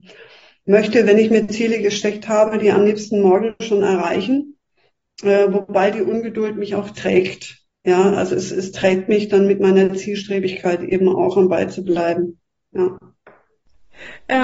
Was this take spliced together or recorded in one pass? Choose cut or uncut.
uncut